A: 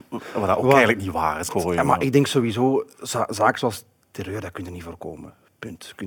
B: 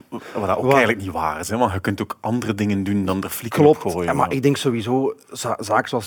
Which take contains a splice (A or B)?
A